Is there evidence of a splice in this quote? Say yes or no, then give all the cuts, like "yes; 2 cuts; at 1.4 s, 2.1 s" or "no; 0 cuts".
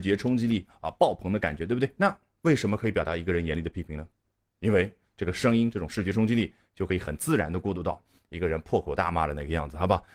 no; 0 cuts